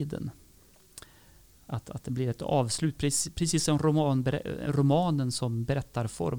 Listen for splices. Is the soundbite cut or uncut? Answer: uncut